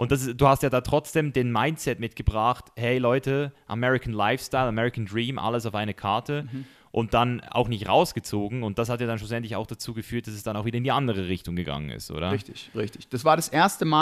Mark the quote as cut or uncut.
uncut